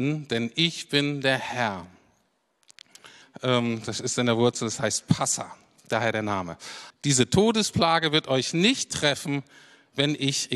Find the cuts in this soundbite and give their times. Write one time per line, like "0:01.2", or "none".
0:03.2
0:06.9